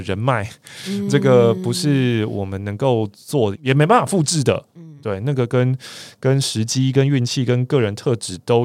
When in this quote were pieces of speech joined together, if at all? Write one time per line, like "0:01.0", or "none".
0:03.5